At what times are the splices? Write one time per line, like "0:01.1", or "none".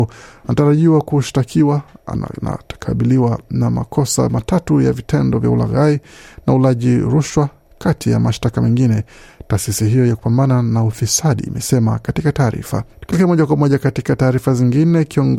0:12.9